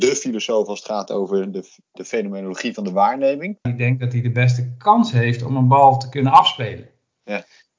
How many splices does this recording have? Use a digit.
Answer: 1